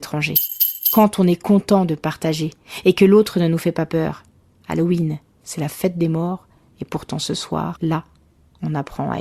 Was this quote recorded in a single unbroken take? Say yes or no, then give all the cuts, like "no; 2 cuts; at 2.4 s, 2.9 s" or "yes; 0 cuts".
yes; 0 cuts